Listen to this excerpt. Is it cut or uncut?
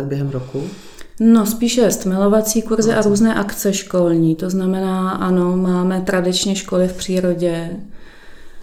uncut